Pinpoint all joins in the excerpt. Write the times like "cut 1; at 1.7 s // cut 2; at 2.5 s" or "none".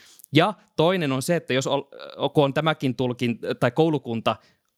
none